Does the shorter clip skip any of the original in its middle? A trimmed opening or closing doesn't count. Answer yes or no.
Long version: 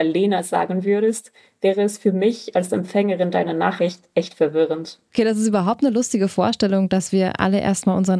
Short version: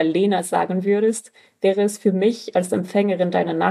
no